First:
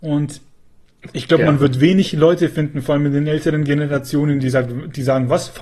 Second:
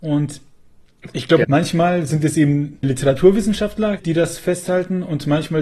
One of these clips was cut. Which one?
second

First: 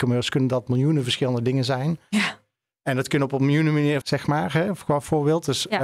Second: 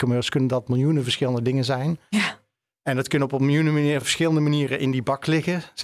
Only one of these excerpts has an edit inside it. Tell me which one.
first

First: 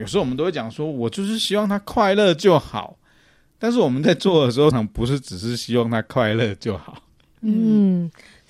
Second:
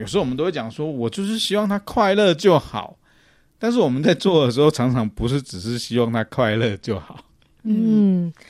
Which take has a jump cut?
first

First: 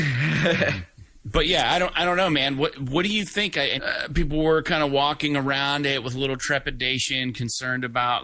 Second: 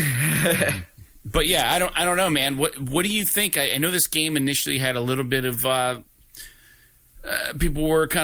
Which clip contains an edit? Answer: first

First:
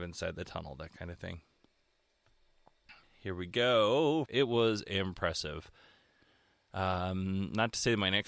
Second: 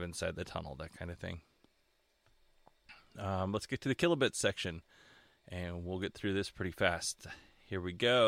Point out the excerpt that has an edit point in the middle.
first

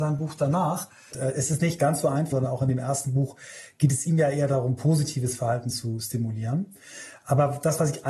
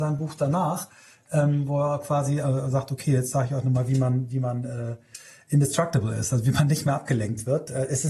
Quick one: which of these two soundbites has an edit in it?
first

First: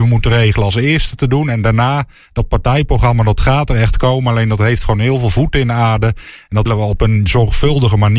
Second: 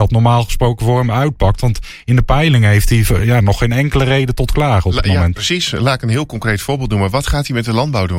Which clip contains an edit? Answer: first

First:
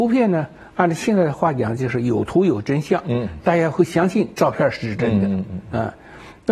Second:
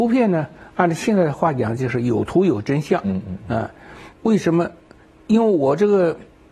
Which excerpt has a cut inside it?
second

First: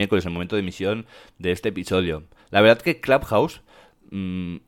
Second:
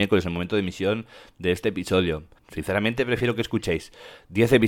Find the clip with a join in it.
second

